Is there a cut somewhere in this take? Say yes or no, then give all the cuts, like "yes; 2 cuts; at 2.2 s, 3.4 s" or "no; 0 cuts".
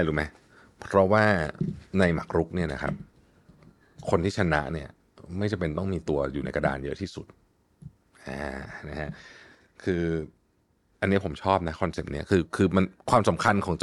no; 0 cuts